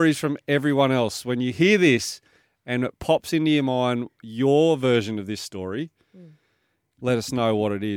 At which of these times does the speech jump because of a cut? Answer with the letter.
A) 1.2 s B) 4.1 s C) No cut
C